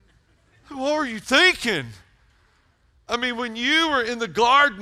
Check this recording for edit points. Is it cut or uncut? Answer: uncut